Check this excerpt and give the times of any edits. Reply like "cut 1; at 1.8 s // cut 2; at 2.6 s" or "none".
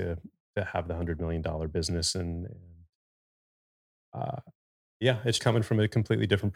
cut 1; at 5.4 s